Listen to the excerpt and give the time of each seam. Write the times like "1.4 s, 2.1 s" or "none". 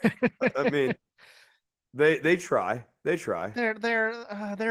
none